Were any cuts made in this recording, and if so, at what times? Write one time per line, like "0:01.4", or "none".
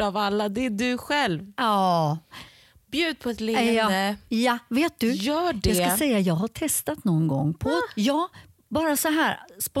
none

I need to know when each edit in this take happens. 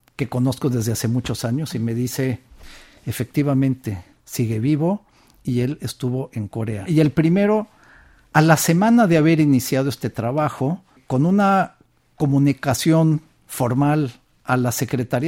0:04.1
0:06.8

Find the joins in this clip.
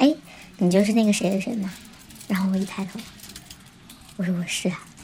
none

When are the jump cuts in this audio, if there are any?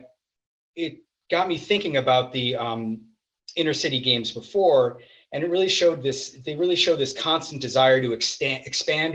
none

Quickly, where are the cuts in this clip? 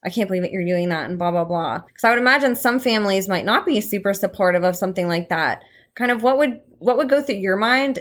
0:01.9

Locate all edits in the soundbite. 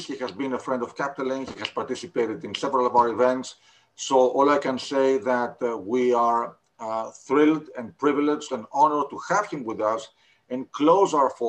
none

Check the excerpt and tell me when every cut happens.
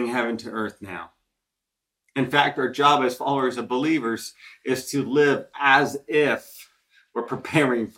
none

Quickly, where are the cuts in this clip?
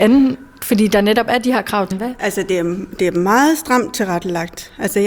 0:01.9

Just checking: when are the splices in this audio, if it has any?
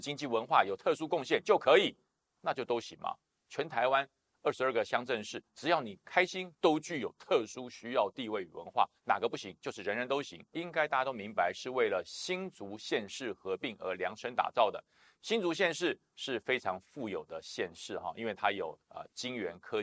0:06.5

